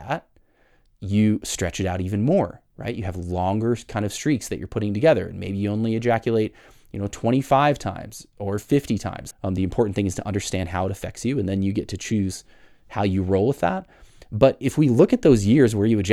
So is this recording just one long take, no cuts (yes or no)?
no